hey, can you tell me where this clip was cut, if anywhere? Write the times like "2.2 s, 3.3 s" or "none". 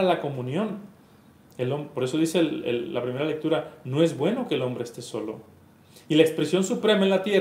none